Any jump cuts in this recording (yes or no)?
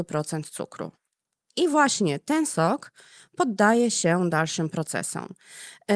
no